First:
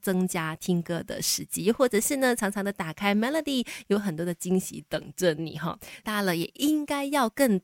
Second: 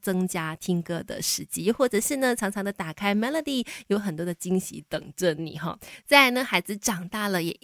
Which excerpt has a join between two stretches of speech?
first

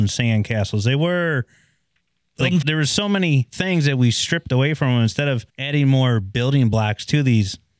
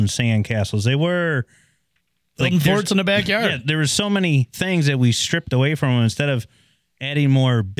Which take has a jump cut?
first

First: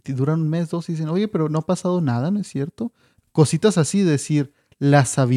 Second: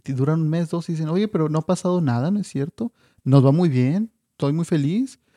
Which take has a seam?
first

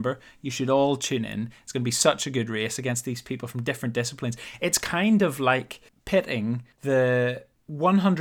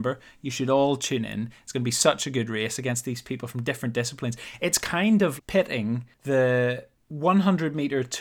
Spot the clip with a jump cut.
second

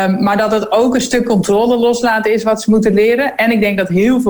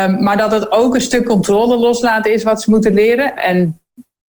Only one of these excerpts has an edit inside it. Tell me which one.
second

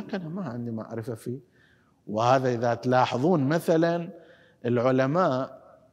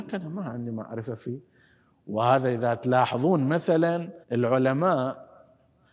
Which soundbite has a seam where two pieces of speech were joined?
second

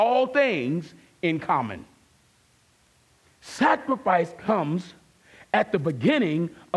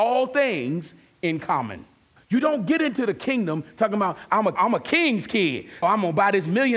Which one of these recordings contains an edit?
second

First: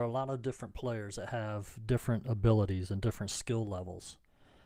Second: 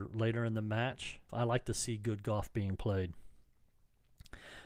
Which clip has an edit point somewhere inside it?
second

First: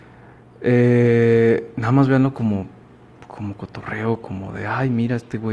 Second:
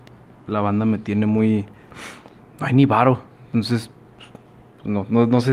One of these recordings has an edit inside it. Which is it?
second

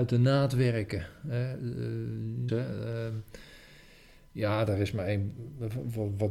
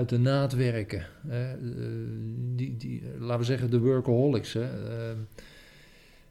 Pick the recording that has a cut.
first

